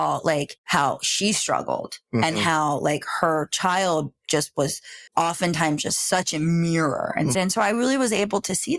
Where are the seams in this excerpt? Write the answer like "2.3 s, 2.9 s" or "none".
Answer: 5.1 s, 7.3 s